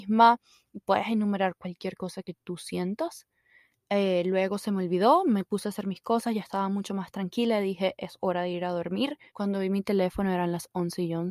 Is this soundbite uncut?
no; 2 cuts; at 3.7 s, 9.3 s

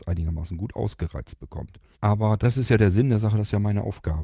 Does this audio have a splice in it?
yes; 1 cut; at 1.9 s

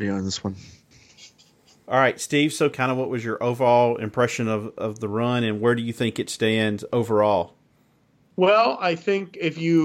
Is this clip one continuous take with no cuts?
no; 1 cut; at 2.7 s

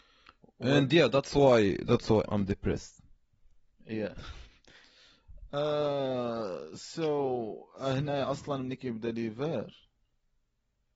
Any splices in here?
yes; 1 cut; at 2.3 s

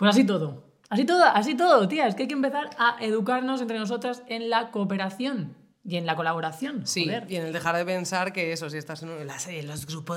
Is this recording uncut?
yes; 0 cuts

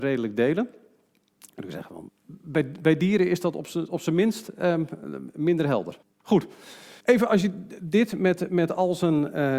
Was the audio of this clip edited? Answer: yes; 2 cuts; at 2.1 s, 7.0 s

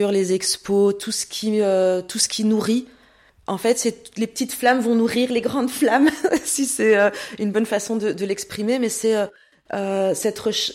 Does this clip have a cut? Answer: no; 0 cuts

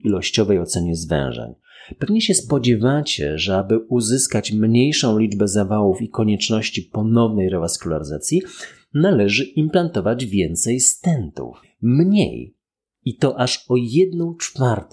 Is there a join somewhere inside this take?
yes; 1 cut; at 11.6 s

